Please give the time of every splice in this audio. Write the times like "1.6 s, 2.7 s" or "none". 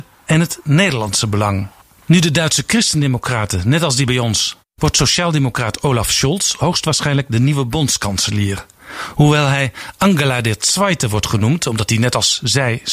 4.6 s